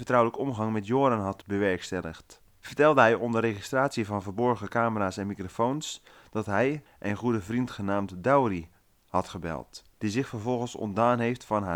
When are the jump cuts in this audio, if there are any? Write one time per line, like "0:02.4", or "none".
0:06.9
0:09.9